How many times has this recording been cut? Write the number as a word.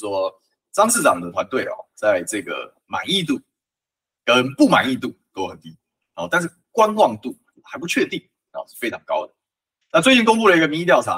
one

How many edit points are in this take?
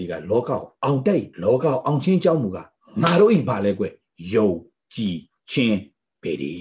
one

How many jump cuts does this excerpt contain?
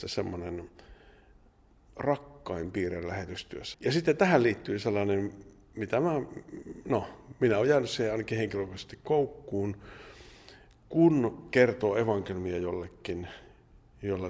one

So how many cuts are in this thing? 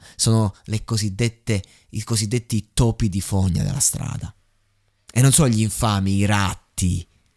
zero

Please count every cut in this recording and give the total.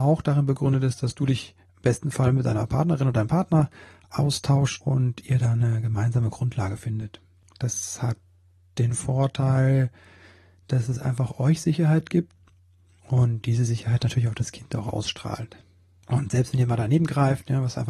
zero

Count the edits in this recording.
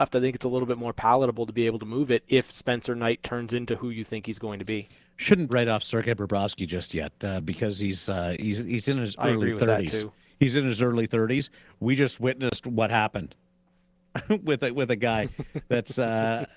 one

